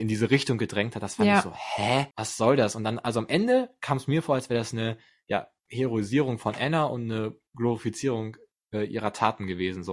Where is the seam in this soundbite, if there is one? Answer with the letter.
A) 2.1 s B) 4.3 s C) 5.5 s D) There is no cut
A